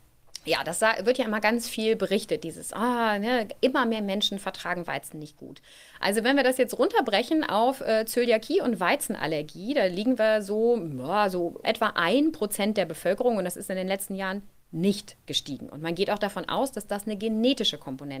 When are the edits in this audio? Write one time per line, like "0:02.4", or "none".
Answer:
0:11.6